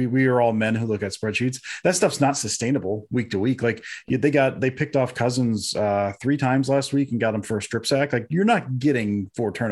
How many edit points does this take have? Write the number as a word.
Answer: zero